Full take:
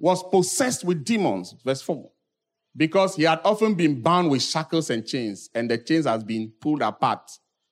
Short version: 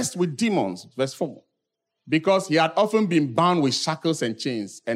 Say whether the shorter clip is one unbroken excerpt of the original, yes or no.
yes